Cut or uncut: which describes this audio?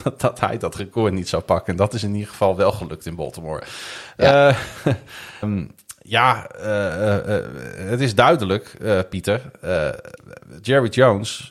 cut